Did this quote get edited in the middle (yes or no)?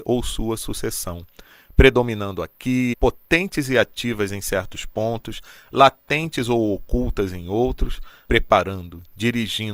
yes